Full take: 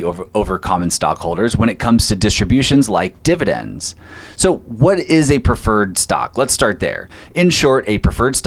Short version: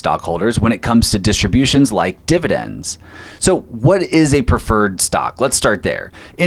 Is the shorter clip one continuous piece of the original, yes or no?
yes